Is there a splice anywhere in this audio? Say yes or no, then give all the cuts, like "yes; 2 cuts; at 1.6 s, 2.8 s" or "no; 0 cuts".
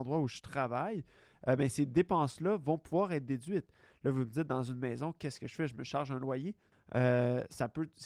yes; 1 cut; at 6.7 s